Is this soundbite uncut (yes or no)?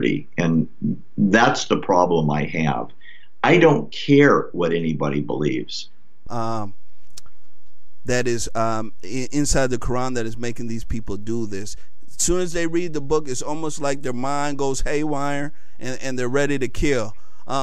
no